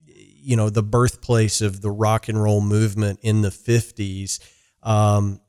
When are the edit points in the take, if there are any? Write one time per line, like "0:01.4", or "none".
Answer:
none